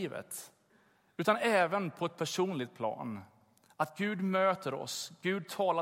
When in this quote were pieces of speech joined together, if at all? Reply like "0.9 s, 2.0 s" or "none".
none